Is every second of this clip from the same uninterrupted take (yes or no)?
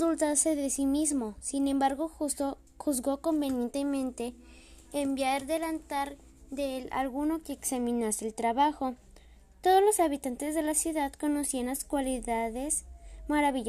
yes